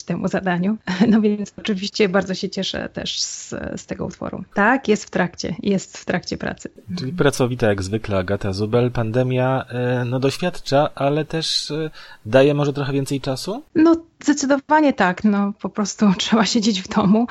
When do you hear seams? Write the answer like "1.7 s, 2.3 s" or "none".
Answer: 4.5 s, 15.2 s